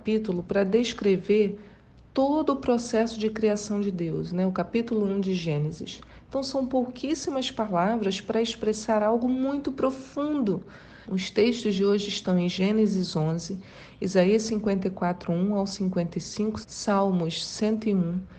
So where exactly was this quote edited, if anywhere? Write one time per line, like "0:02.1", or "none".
0:11.0
0:16.6